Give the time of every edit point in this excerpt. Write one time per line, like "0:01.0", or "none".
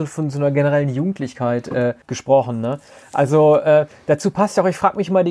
0:02.0